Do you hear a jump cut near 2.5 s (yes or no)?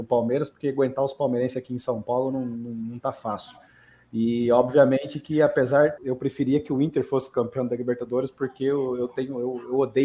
no